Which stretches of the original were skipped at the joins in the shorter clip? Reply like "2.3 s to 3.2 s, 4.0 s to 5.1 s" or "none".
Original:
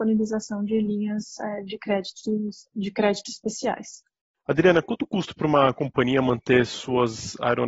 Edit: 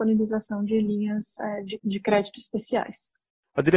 1.8 s to 2.7 s